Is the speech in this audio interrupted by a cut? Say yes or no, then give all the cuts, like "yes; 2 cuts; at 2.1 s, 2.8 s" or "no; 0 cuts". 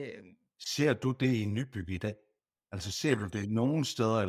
no; 0 cuts